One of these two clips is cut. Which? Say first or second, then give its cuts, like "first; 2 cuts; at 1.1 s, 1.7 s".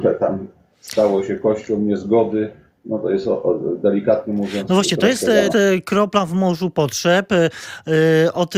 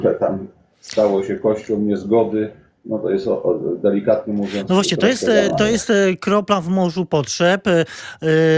first; 1 cut; at 5.5 s